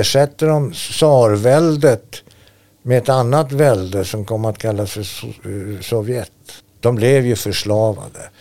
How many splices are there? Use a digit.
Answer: 1